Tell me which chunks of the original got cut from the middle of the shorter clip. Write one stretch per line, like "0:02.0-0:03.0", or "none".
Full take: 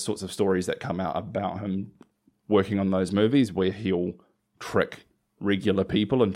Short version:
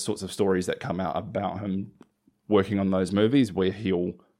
none